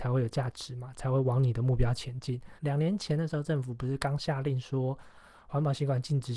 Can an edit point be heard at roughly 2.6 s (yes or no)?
yes